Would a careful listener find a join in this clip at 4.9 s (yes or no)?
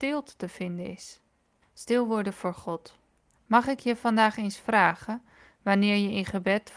no